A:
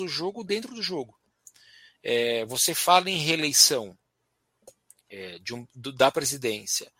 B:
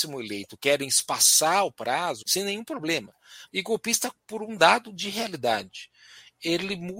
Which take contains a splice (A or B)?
B